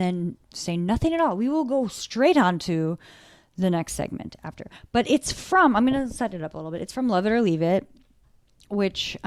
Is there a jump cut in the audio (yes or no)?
no